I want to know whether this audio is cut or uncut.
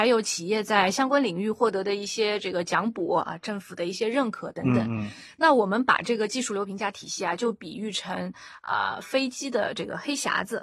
uncut